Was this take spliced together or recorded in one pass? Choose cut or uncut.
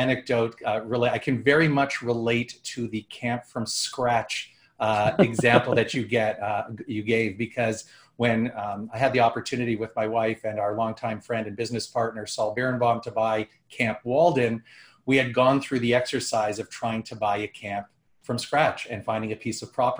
uncut